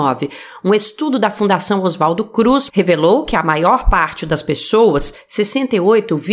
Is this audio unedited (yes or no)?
no